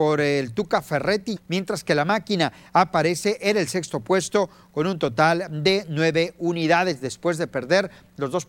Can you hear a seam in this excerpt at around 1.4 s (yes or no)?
yes